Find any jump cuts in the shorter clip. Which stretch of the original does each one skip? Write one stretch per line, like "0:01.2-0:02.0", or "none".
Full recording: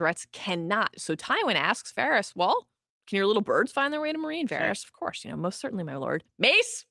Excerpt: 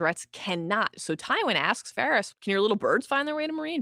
0:02.3-0:03.0